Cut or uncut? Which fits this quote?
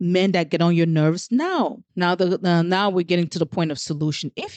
cut